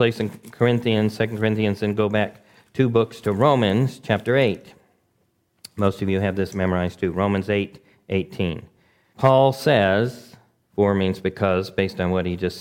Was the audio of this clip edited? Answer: yes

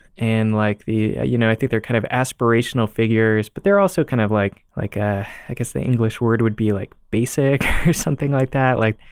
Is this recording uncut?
no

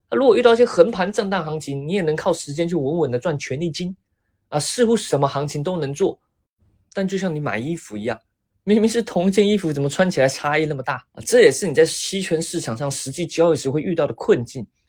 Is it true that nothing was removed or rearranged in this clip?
no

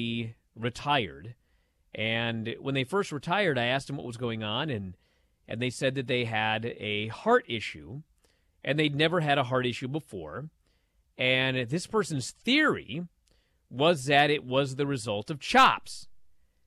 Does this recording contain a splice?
no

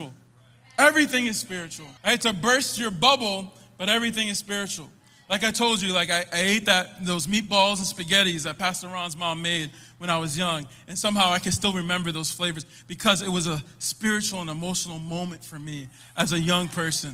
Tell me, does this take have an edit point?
yes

